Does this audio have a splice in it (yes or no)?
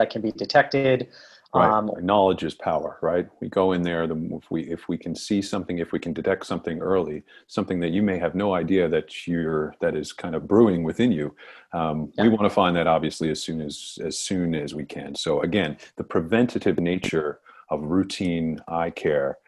yes